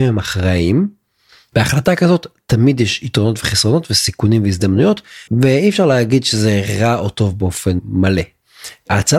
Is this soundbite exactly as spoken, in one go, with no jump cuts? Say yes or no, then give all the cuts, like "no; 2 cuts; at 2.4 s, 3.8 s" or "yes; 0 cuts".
no; 2 cuts; at 1.5 s, 5.3 s